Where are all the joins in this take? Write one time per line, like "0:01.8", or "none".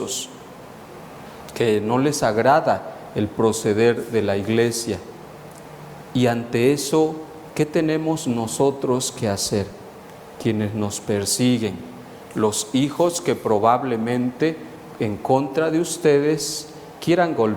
none